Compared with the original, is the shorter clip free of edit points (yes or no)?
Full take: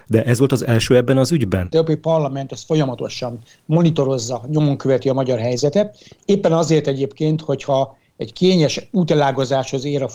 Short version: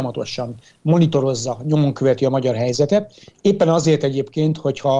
yes